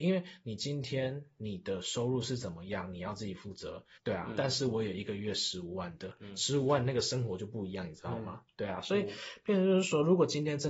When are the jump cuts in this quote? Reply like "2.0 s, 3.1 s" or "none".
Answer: 4.0 s